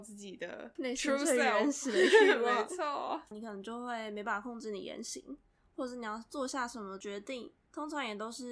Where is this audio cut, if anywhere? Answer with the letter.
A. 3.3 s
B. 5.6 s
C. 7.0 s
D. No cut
A